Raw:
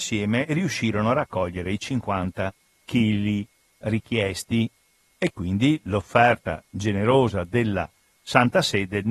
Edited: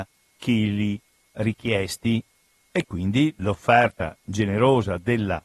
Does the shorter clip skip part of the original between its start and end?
no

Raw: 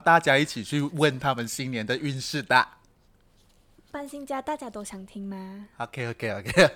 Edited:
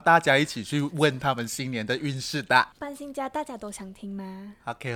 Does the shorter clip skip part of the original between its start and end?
yes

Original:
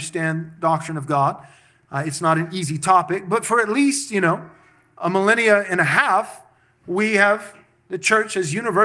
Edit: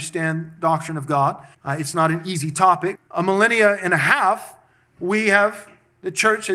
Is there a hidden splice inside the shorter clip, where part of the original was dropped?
yes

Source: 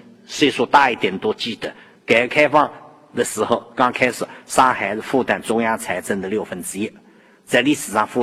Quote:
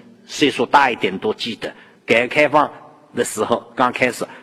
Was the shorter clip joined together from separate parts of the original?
no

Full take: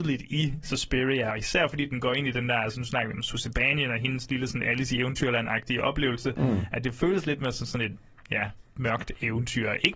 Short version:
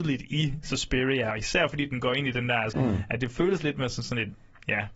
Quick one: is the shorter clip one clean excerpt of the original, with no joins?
no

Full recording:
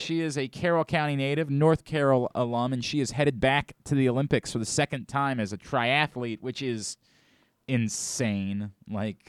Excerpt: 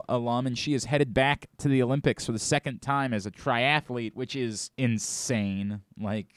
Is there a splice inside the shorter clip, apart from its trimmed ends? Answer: yes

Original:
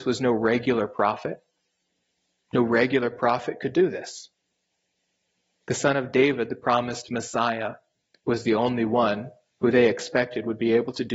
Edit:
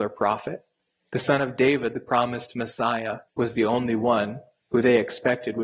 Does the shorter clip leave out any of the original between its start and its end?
yes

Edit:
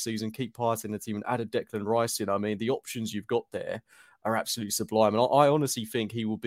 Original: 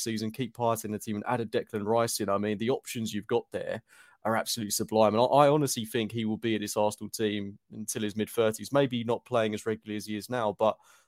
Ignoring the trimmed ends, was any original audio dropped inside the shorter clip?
no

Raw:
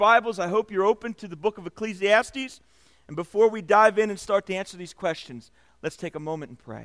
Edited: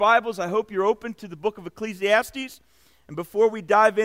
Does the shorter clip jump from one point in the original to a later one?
no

